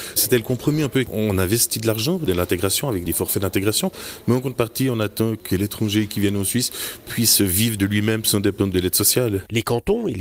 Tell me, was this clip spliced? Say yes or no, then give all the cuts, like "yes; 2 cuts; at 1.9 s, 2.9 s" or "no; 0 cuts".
no; 0 cuts